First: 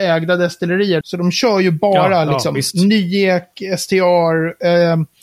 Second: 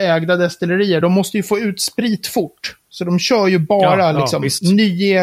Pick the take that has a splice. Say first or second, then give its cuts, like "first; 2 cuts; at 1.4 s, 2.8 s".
first; 1 cut; at 1.0 s